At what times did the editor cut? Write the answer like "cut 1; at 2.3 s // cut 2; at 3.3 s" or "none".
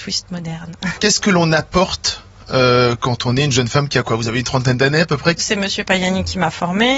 cut 1; at 5.4 s